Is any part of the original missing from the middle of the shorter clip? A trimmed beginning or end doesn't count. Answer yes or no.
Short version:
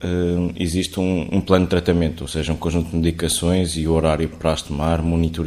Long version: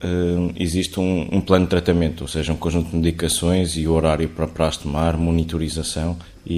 yes